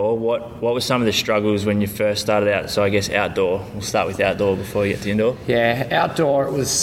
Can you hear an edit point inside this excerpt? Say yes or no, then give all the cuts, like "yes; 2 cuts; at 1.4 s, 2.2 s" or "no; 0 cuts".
no; 0 cuts